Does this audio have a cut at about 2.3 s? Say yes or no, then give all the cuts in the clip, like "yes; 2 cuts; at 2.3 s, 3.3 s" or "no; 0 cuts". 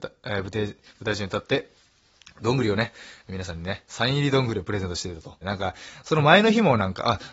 no; 1 cut; at 5.4 s